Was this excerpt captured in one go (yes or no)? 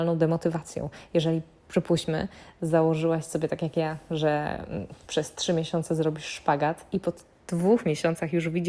yes